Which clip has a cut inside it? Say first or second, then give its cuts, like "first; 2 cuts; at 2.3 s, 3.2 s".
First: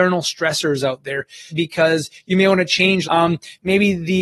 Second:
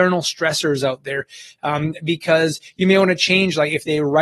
first; 2 cuts; at 1.5 s, 3.0 s